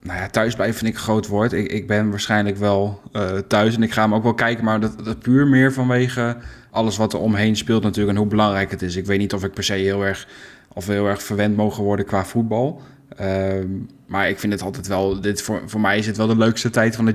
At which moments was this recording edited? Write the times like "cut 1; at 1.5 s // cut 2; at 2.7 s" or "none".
cut 1; at 6.7 s

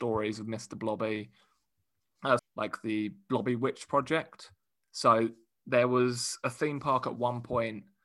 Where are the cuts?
cut 1; at 2.4 s

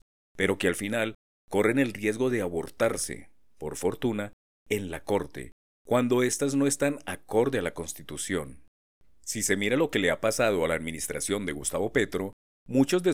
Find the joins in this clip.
none

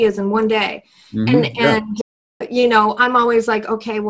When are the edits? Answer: none

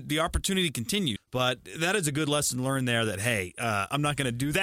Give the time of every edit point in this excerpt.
cut 1; at 1.2 s

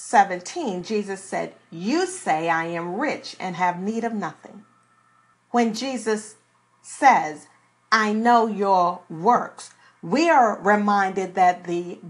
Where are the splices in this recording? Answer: cut 1; at 5.3 s

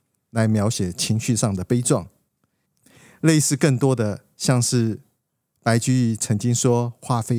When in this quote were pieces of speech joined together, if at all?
cut 1; at 2.6 s

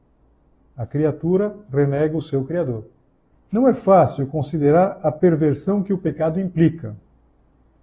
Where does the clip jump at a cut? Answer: cut 1; at 3.3 s

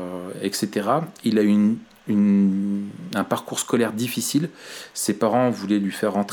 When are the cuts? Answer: none

